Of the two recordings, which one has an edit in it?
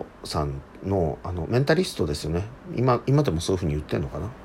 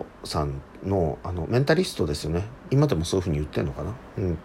second; 1 cut; at 2.7 s

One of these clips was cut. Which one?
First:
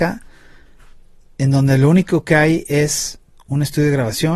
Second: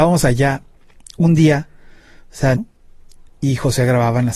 second; 1 cut; at 2.5 s

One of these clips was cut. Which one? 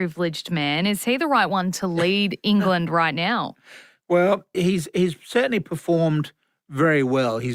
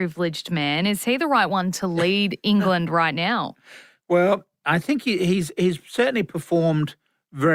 first; 1 cut; at 4.5 s

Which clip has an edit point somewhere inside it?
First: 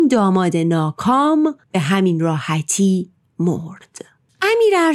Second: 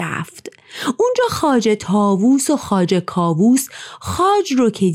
first; 1 cut; at 1.6 s

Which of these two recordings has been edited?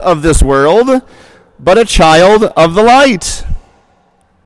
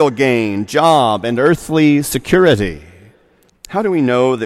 second; 1 cut; at 3.5 s

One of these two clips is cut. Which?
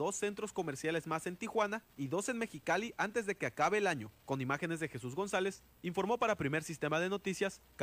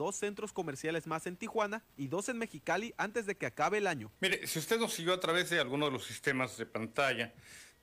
second; 1 cut; at 4.2 s

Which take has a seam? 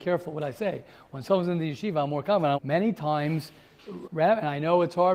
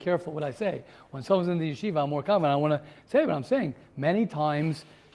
first; 2 cuts; at 2.5 s, 4.0 s

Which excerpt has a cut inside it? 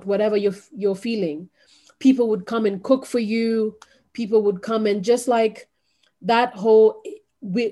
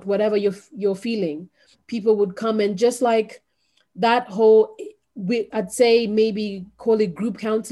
second; 2 cuts; at 1.7 s, 5.5 s

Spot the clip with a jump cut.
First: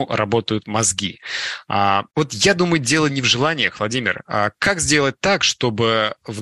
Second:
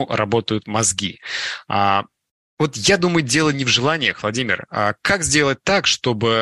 first; 1 cut; at 2.1 s

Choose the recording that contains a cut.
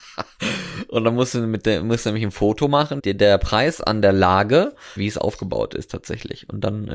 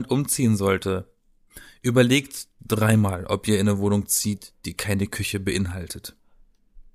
first; 2 cuts; at 3.0 s, 5.0 s

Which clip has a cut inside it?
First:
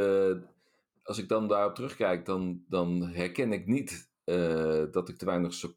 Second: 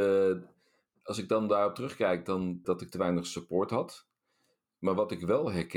second; 1 cut; at 2.6 s

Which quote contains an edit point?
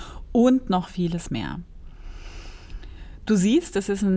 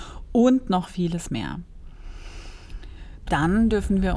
second; 1 cut; at 3.3 s

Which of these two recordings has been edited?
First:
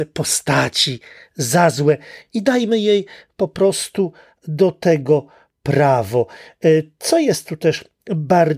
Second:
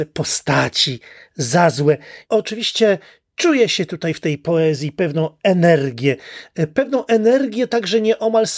second; 1 cut; at 2.2 s

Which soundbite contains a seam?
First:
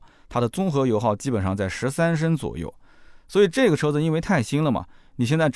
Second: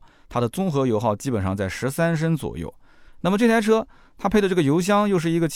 second; 1 cut; at 3.1 s

